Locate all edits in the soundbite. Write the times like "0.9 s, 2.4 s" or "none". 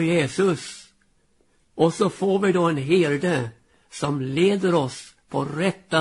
none